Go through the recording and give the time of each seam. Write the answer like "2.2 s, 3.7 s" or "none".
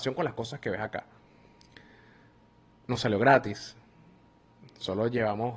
none

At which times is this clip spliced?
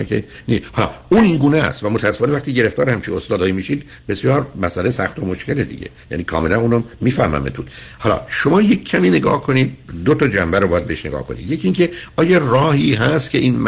none

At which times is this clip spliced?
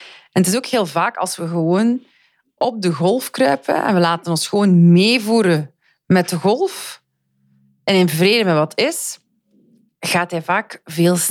none

